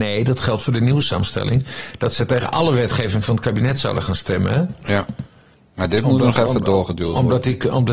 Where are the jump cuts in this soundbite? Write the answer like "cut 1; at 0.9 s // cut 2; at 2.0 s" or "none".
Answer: none